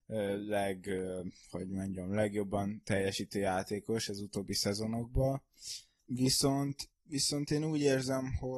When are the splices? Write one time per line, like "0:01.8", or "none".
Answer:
none